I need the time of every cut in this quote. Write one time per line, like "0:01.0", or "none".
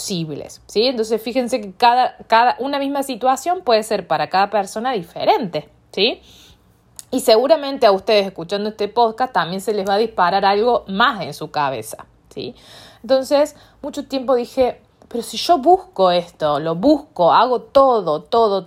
none